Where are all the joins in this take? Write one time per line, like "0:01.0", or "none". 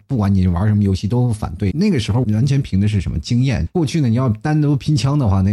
0:01.7
0:03.7